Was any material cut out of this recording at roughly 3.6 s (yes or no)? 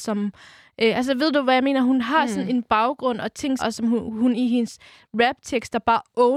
yes